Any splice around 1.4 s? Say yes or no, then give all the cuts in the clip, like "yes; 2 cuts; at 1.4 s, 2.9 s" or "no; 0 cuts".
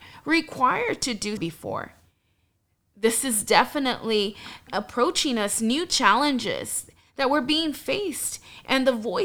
yes; 2 cuts; at 1.4 s, 4.7 s